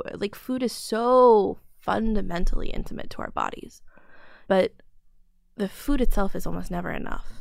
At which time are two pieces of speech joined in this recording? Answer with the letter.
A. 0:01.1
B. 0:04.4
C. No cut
B